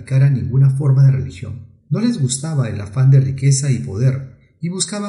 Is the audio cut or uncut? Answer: cut